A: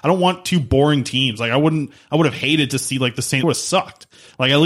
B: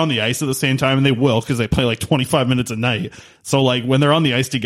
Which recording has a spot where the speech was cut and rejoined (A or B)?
A